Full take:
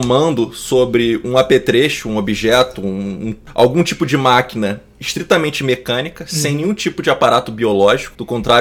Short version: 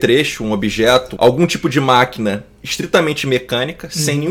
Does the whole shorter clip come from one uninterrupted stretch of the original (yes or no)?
no